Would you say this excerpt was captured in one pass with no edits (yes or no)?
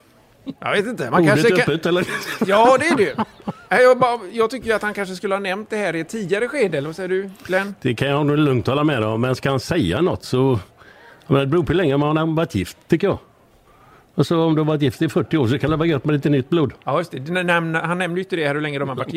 yes